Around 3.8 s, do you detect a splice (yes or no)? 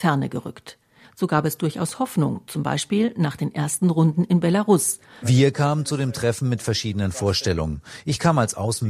no